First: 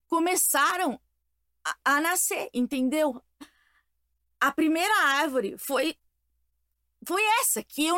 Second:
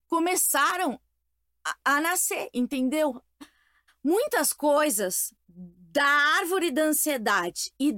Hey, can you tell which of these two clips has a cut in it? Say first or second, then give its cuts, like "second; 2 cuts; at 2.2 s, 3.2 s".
second; 2 cuts; at 3.9 s, 5.4 s